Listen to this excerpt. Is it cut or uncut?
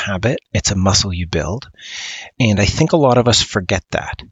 cut